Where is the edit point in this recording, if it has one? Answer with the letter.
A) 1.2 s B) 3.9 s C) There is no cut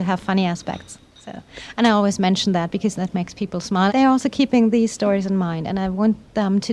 B